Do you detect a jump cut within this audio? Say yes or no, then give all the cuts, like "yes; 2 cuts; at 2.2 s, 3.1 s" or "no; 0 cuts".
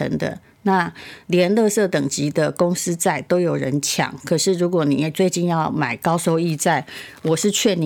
no; 0 cuts